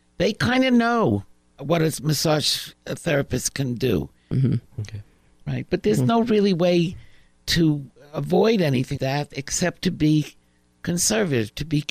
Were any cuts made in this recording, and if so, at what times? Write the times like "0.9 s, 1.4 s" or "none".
4.7 s, 9.0 s